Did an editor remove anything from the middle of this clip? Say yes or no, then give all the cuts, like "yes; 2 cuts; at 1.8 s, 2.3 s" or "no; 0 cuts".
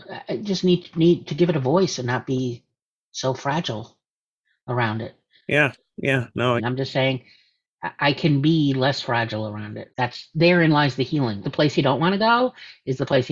yes; 3 cuts; at 6.6 s, 9.9 s, 11.4 s